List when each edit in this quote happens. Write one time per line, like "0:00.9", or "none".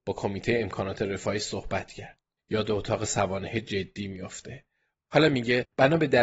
0:02.4
0:04.9